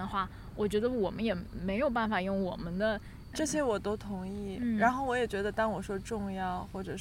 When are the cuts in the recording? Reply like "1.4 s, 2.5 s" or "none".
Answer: 3.3 s